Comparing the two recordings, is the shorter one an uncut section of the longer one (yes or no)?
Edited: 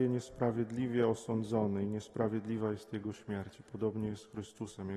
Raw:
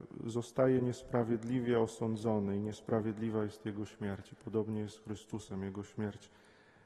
yes